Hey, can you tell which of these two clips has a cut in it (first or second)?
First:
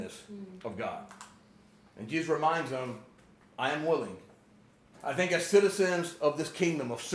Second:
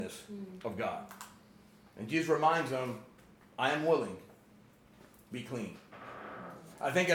first